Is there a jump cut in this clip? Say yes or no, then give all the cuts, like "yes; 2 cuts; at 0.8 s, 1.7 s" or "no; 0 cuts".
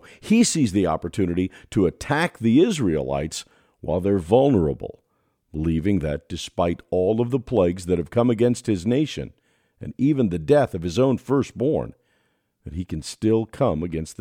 no; 0 cuts